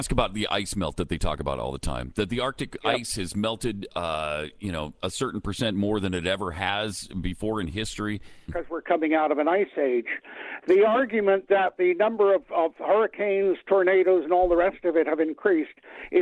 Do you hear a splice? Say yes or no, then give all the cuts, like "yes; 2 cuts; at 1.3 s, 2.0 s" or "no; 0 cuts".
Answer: yes; 1 cut; at 8.5 s